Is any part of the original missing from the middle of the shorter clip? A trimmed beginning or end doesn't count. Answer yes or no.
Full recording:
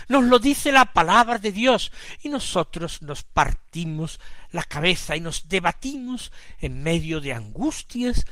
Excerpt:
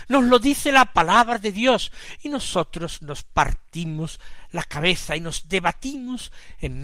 no